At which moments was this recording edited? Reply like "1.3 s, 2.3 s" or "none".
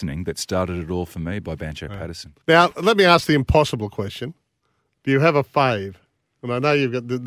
2.4 s